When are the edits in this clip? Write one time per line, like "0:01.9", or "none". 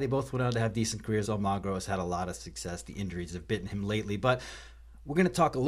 0:01.2